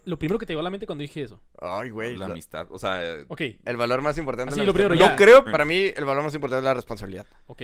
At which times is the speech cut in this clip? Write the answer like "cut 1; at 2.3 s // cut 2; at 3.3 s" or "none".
cut 1; at 5.5 s